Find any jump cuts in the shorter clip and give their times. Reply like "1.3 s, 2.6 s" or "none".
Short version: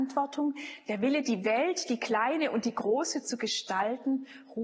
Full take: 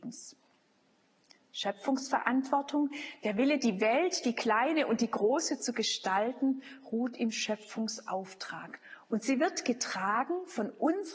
none